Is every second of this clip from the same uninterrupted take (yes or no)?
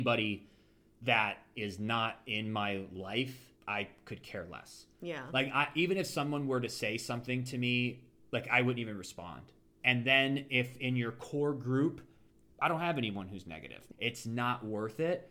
no